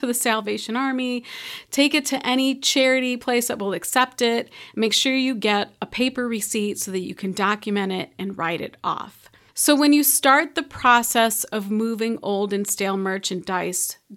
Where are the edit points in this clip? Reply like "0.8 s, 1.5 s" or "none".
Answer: 9.5 s